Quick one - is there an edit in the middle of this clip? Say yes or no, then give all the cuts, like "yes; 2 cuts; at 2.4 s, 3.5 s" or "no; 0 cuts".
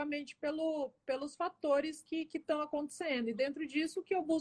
no; 0 cuts